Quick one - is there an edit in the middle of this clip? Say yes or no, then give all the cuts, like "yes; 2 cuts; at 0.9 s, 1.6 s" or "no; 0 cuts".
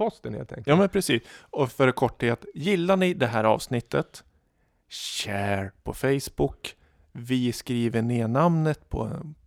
no; 0 cuts